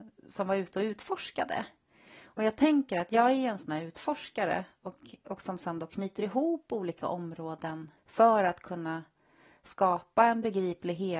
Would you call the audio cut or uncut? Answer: uncut